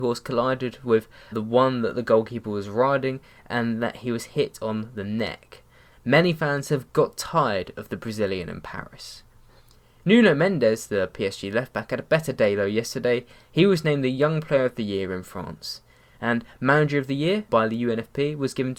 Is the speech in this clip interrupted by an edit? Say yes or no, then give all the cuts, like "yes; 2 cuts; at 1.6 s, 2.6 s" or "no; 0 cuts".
yes; 3 cuts; at 1.3 s, 5.9 s, 17.5 s